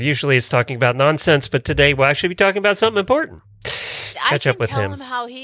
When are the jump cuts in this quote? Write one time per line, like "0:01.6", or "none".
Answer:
0:04.1